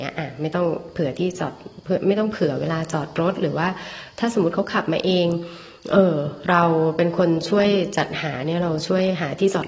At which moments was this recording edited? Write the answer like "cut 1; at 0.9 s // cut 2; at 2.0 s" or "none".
none